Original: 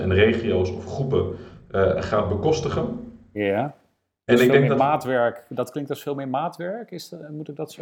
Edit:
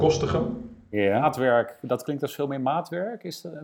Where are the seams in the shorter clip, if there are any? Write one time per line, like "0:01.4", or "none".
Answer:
0:01.2